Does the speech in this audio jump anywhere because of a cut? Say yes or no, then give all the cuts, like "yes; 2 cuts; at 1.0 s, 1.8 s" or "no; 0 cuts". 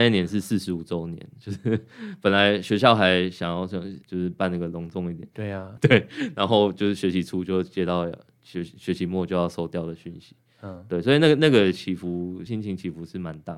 yes; 3 cuts; at 4.0 s, 5.8 s, 12.5 s